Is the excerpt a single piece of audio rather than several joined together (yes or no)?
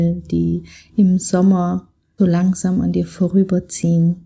no